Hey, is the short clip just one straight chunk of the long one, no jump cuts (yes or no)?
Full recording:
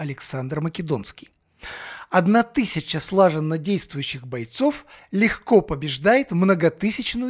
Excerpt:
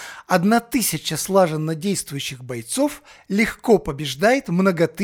yes